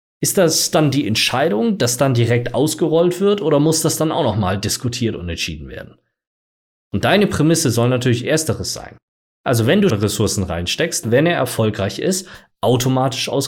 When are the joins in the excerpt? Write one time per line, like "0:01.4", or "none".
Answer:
0:09.9
0:11.0